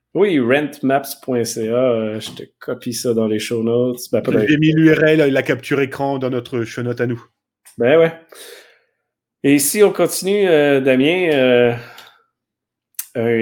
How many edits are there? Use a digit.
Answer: 0